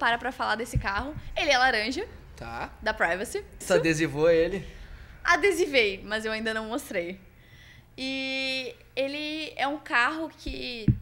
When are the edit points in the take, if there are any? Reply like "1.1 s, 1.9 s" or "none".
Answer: 3.6 s